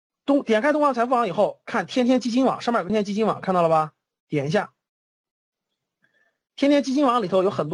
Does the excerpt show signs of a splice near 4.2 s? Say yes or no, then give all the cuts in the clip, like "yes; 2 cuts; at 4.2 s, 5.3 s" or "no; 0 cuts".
no; 1 cut; at 2.9 s